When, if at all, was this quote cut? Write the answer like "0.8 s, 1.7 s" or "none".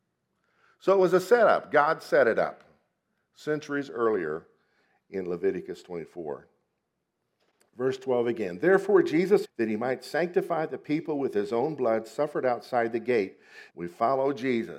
9.4 s, 13.7 s